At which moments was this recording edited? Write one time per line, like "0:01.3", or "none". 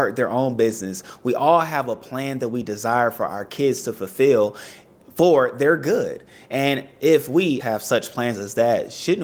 0:07.6